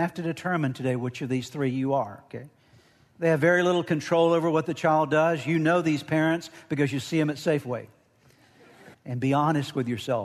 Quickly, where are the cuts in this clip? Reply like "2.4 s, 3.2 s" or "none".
3.1 s, 8.9 s